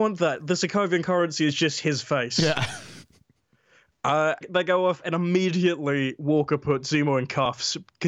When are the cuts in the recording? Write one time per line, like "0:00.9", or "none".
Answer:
0:04.4